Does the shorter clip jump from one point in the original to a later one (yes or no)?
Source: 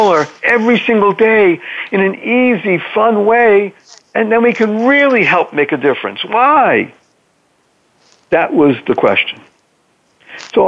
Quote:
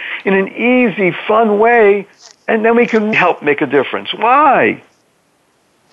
yes